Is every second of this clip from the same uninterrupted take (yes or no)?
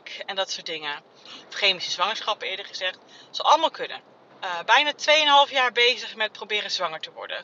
no